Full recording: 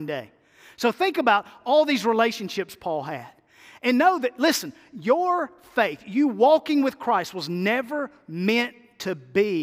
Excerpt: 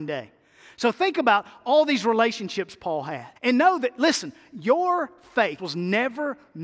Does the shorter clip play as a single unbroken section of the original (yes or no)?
no